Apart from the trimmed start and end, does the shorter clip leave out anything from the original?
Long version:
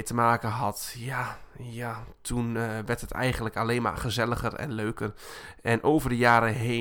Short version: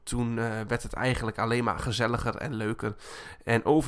no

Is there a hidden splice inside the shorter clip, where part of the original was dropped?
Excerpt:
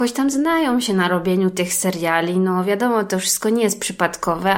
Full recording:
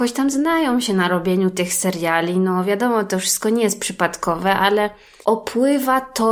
no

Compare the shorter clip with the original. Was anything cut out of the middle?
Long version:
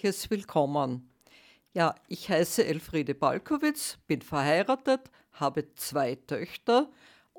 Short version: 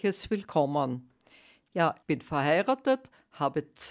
yes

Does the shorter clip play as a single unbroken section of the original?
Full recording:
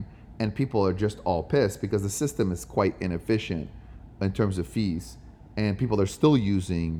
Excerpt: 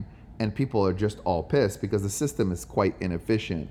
yes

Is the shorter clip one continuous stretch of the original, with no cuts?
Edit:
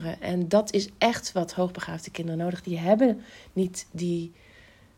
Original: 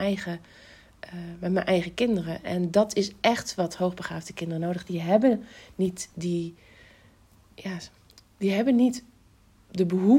yes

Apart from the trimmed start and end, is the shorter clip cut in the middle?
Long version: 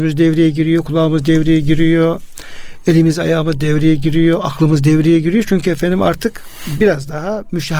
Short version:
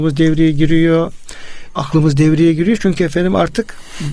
yes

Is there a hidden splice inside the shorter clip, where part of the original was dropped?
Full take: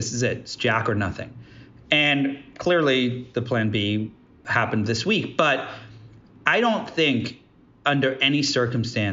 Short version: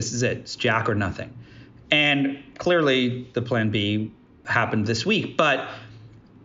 no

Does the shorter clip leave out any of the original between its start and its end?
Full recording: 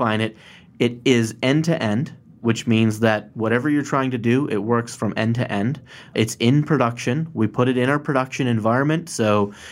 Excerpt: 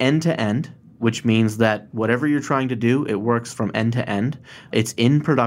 no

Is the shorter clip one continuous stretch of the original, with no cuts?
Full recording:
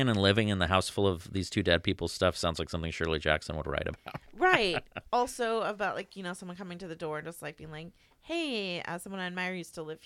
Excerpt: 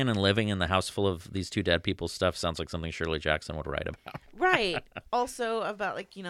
yes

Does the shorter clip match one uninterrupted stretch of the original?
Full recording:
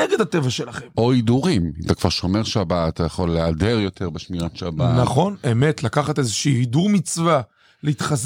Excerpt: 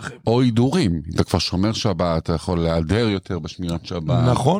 yes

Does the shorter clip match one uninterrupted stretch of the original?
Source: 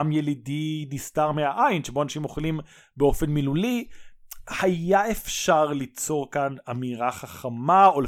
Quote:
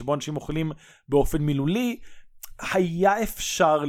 yes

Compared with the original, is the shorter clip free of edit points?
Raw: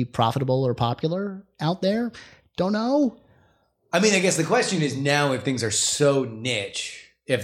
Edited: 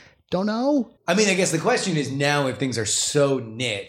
no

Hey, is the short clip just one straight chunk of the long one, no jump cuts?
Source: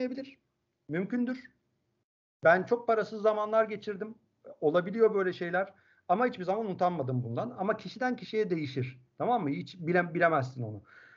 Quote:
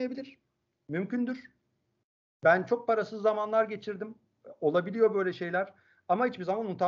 yes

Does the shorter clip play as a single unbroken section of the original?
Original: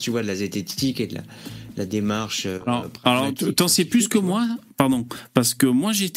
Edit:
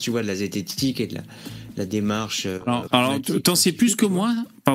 no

